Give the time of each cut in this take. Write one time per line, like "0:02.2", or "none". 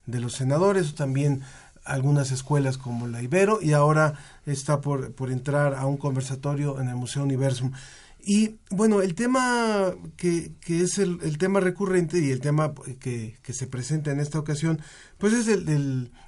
0:00.9